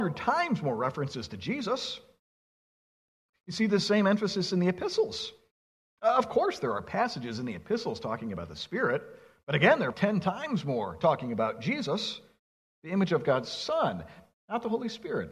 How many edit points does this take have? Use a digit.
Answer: 2